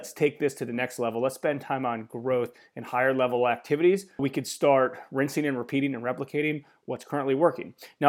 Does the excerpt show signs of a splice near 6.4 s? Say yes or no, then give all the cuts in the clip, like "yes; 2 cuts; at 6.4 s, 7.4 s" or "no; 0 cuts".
no; 1 cut; at 4.2 s